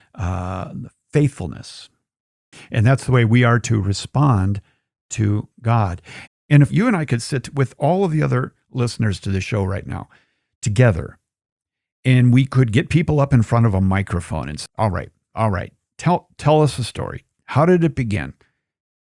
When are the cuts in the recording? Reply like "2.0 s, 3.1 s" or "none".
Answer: 2.5 s, 6.3 s, 14.7 s